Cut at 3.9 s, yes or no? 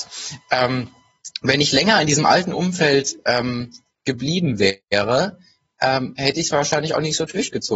no